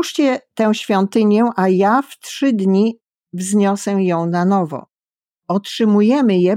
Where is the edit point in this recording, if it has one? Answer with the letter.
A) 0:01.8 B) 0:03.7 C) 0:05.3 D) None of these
C